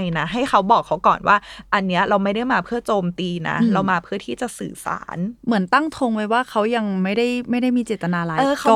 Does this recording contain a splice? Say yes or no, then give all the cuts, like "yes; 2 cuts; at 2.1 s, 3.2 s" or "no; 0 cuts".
no; 0 cuts